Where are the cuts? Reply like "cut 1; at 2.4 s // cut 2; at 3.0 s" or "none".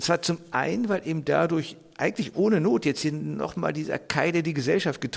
none